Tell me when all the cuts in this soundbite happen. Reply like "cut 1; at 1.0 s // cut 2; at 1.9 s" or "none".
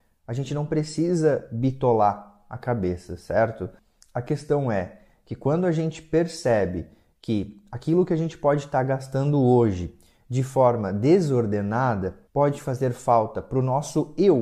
cut 1; at 12.3 s